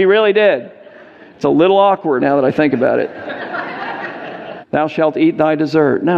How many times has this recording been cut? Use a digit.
2